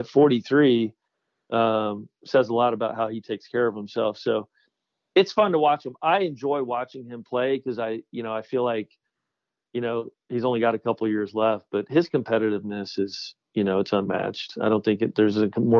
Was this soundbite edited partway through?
no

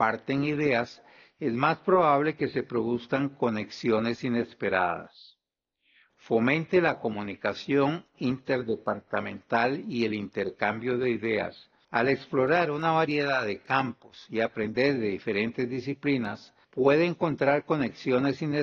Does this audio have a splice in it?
yes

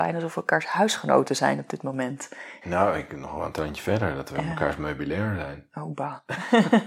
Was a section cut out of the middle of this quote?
yes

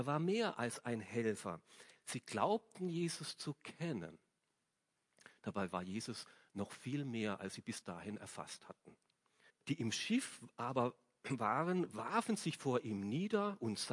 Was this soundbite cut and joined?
yes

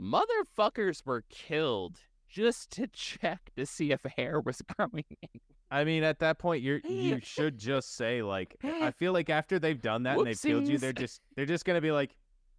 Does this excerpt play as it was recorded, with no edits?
yes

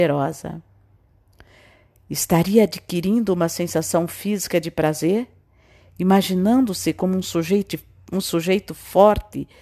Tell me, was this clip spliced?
no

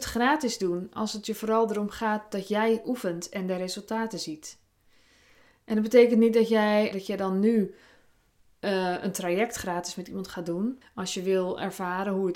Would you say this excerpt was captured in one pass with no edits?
no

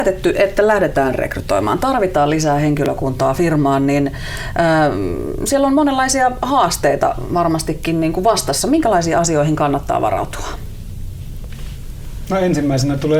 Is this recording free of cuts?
yes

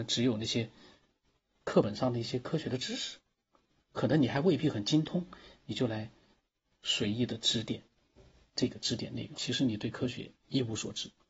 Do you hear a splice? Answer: yes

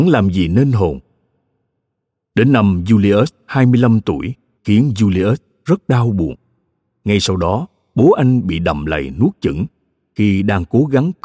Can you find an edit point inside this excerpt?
yes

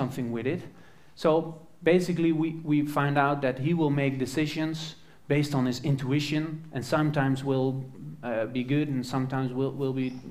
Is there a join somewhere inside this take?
no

